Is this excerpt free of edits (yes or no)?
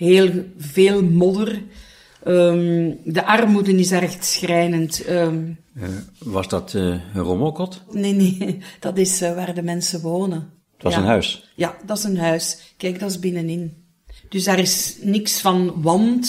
no